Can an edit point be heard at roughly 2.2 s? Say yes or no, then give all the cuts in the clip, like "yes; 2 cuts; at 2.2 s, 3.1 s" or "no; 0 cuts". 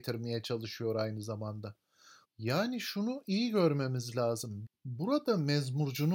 yes; 2 cuts; at 2.2 s, 4.7 s